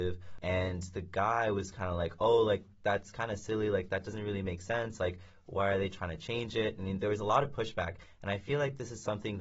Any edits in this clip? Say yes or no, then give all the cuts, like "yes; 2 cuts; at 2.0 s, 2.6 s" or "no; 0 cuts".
no; 0 cuts